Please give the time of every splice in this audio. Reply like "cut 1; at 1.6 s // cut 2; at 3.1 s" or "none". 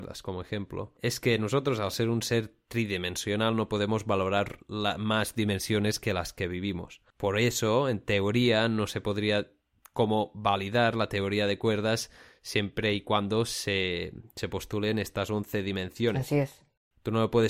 cut 1; at 7.1 s

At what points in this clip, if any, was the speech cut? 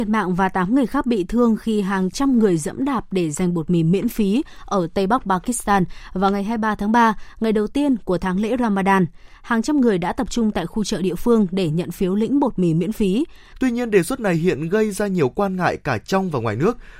cut 1; at 13.5 s

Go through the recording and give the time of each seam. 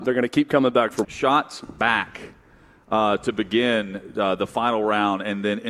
cut 1; at 1.0 s

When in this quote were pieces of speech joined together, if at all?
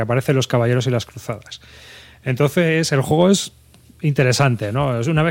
none

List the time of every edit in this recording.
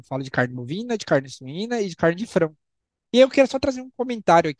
cut 1; at 3.1 s

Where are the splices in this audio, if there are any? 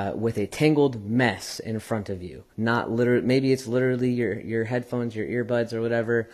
cut 1; at 2.5 s

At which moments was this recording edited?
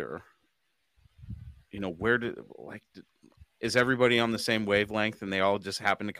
none

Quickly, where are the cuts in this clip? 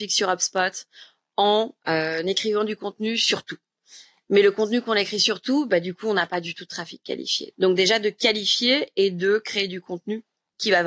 cut 1; at 7.5 s

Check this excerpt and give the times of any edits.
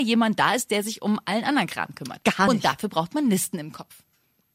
none

